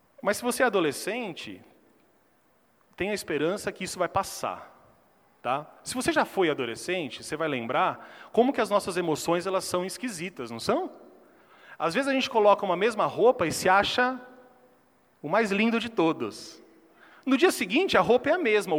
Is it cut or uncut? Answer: uncut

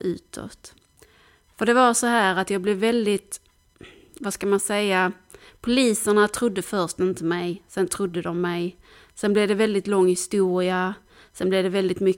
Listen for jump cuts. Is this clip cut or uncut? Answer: uncut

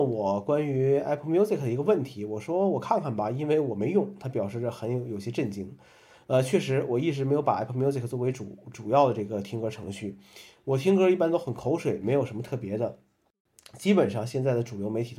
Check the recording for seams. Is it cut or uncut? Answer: uncut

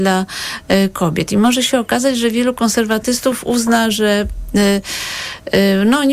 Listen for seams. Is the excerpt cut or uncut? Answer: uncut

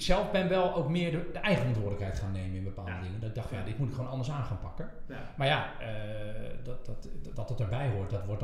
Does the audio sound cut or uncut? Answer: uncut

